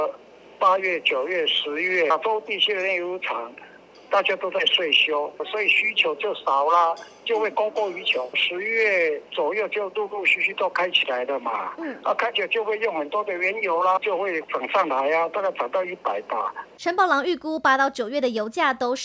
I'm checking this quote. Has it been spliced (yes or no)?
no